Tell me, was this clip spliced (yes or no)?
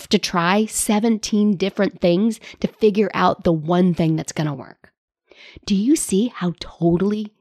no